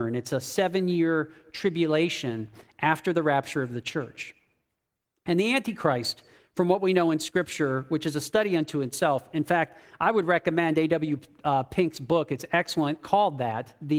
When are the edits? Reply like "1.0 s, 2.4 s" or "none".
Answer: none